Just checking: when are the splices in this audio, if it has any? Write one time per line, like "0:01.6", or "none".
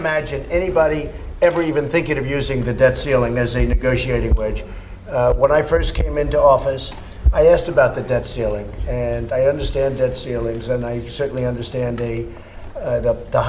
none